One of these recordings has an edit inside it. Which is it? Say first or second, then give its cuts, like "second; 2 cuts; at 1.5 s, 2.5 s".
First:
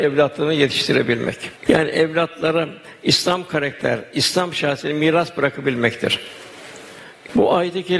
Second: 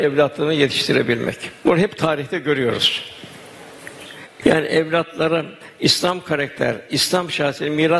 first; 1 cut; at 1.6 s